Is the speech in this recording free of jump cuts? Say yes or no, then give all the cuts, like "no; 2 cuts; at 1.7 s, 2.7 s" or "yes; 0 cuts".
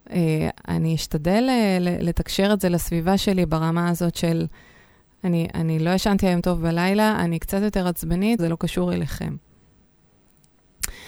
no; 1 cut; at 8.4 s